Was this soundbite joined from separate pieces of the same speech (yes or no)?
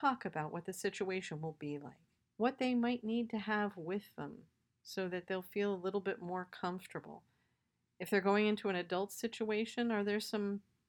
yes